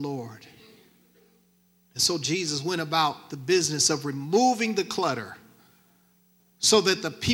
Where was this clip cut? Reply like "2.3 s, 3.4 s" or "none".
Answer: 6.4 s